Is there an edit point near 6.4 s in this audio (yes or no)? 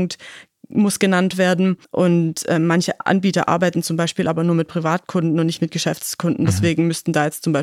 no